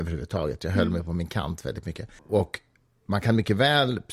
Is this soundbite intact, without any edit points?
no; 1 cut; at 2.2 s

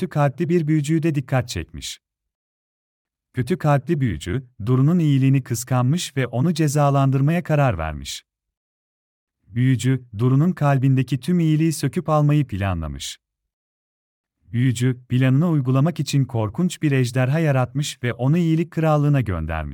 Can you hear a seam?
no; 0 cuts

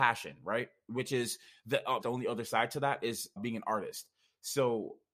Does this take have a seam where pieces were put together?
yes; 2 cuts; at 2.0 s, 3.4 s

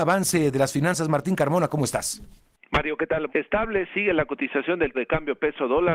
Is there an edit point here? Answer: yes; 2 cuts; at 3.3 s, 4.9 s

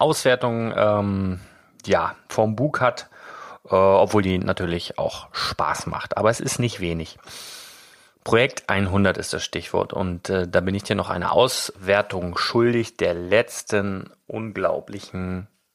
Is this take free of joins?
yes; 0 cuts

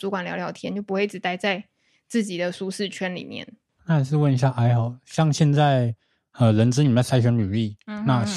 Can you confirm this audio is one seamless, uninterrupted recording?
yes; 0 cuts

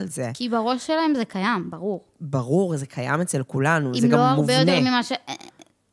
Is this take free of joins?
yes; 0 cuts

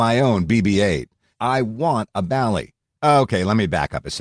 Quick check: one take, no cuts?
no; 2 cuts; at 1.3 s, 2.9 s

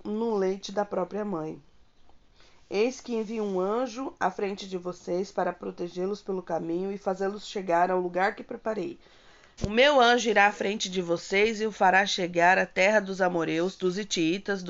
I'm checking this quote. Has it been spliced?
yes; 1 cut; at 9.6 s

